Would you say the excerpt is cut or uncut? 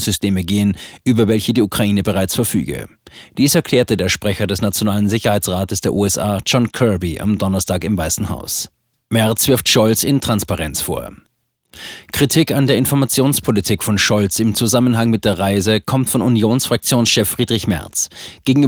uncut